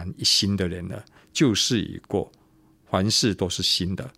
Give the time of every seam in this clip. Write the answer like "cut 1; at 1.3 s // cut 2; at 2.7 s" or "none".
none